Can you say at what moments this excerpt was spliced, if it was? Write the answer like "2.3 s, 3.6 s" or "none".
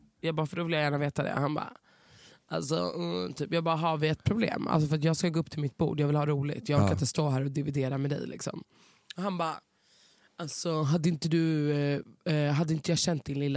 none